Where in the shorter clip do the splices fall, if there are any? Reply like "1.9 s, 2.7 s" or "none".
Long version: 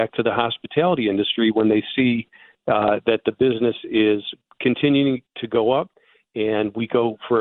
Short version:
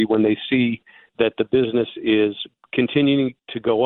1.1 s

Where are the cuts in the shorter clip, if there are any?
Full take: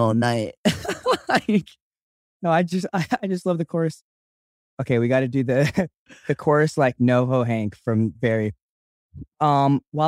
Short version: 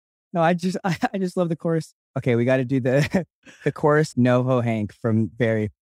2.0 s, 4.1 s

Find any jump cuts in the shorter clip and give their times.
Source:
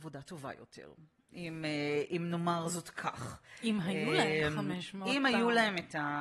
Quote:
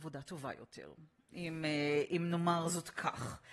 none

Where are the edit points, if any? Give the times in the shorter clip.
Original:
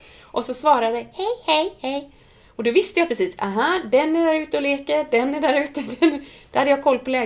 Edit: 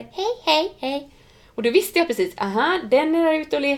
none

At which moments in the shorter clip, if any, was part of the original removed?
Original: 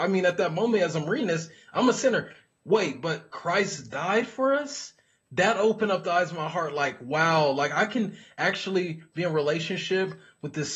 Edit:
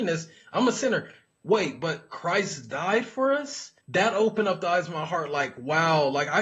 3.8 s

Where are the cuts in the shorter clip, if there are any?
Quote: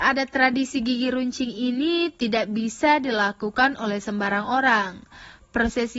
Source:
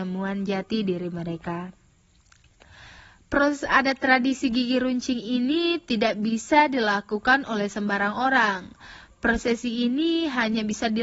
none

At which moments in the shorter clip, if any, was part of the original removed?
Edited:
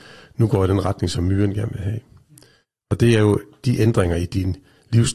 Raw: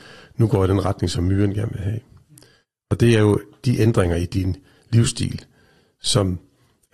none

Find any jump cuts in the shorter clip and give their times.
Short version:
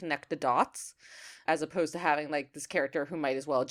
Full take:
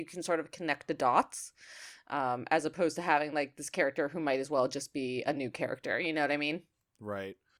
1.5 s

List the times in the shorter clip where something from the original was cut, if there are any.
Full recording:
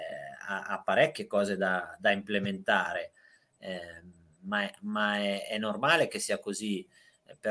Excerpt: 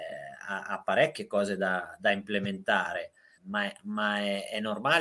3.4 s

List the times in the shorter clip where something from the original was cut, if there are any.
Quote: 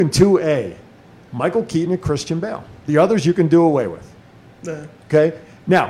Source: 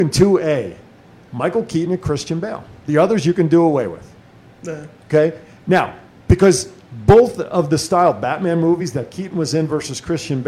none

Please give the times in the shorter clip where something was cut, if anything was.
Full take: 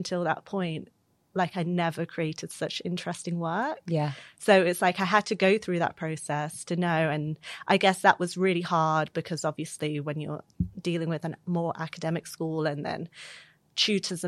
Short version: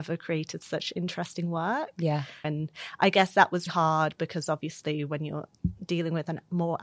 2.4 s, 3.7 s

